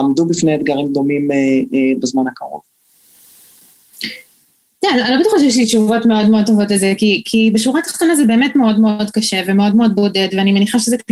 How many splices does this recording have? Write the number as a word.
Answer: zero